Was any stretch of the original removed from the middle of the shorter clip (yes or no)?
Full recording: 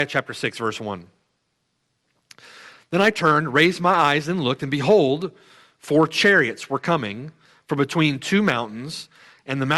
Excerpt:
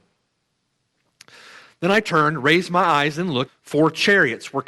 yes